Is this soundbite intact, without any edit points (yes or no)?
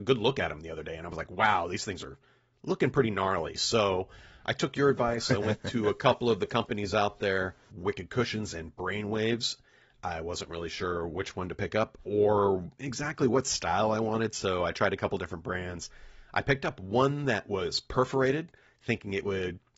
yes